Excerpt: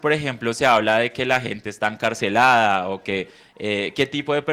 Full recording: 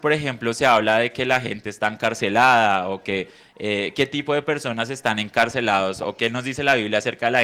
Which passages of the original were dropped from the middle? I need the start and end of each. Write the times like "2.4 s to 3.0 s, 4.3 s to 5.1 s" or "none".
none